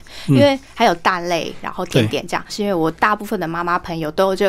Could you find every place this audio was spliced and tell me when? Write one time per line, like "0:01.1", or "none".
0:02.5